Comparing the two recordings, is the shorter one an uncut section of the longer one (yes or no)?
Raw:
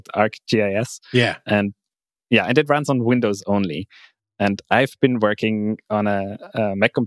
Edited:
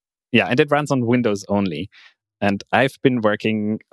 yes